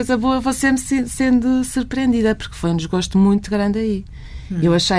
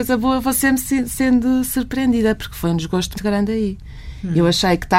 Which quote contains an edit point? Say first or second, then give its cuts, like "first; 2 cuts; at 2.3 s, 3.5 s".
second; 1 cut; at 3.1 s